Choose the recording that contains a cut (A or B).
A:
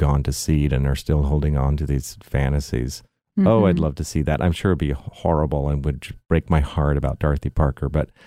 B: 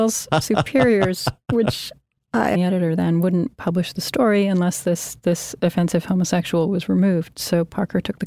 B